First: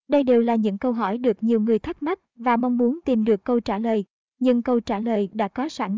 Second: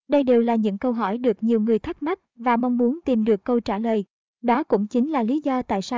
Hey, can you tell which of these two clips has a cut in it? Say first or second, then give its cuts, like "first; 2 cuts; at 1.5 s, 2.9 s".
second; 1 cut; at 4.3 s